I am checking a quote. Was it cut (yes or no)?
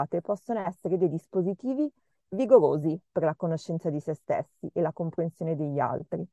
no